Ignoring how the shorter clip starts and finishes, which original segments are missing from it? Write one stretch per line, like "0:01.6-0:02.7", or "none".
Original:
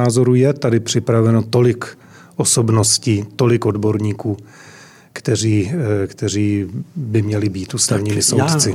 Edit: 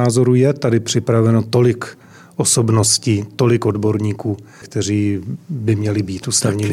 0:04.6-0:06.1

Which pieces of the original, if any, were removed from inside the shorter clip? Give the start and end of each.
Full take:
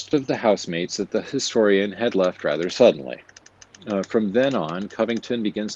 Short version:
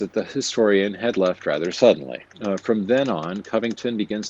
0:03.3-0:03.8

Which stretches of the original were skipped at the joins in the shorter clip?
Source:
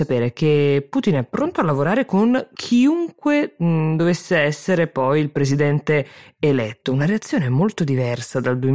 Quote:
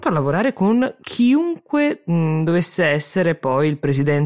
none

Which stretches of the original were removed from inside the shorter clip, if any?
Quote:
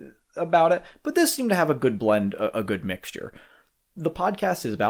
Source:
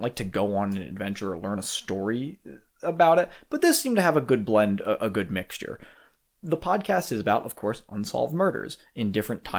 none

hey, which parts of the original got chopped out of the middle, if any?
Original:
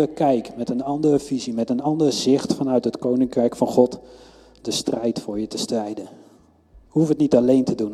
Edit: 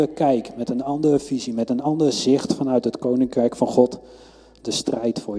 none

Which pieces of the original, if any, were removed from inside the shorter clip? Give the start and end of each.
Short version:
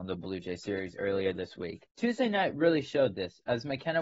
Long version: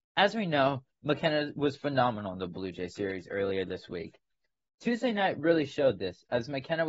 0:04.2-0:04.7

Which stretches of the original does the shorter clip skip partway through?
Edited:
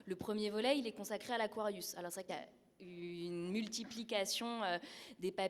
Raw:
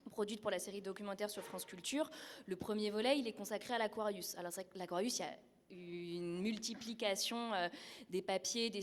0:04.7-0:05.2

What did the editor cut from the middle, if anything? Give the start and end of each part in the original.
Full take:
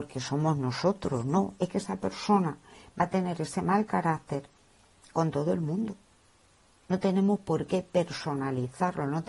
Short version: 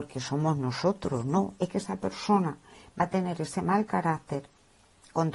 none

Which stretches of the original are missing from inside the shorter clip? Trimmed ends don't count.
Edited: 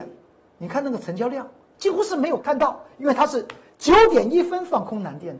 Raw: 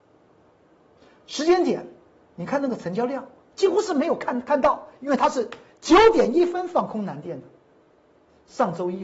0:04.2-0:04.4

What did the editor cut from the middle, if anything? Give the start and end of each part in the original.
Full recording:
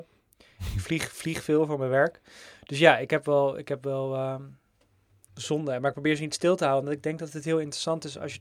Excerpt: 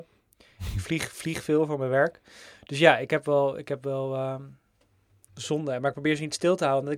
none

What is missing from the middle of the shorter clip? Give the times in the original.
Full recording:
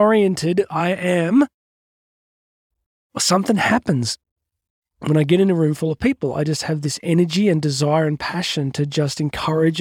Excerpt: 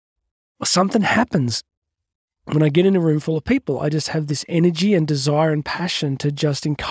none

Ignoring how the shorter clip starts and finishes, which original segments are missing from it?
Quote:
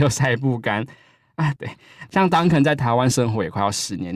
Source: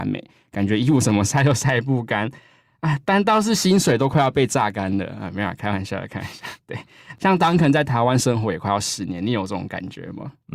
0:03.0-0:06.6

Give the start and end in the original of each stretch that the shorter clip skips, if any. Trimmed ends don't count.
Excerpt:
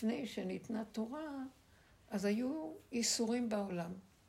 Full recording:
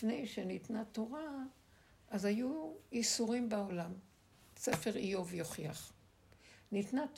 none

